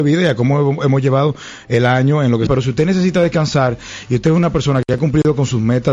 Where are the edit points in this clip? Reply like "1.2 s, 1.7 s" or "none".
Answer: 2.5 s